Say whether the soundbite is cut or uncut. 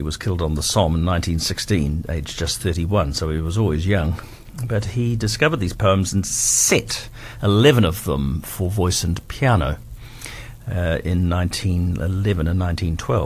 uncut